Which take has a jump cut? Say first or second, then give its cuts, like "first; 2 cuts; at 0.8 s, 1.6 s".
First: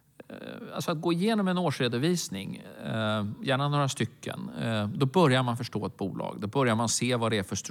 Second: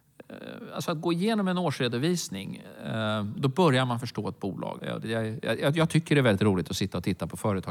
second; 2 cuts; at 3.4 s, 4.8 s